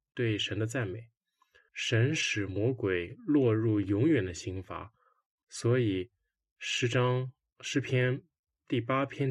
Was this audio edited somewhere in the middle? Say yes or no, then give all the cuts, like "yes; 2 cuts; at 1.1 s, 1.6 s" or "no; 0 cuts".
yes; 2 cuts; at 1.7 s, 5.4 s